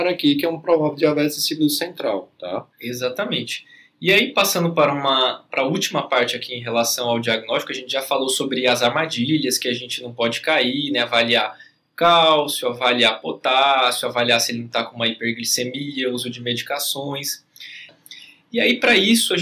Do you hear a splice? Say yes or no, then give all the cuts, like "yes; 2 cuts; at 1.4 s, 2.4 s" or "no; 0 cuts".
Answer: yes; 2 cuts; at 2.7 s, 17.9 s